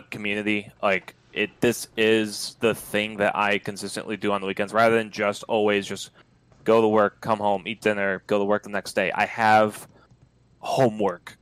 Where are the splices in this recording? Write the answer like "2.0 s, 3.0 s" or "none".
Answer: 8.2 s